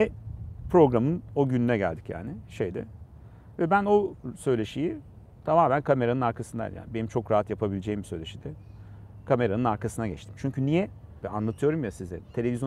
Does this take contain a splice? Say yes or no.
yes